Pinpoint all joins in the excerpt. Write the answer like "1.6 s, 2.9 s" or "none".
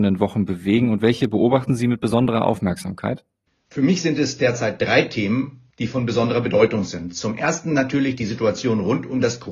none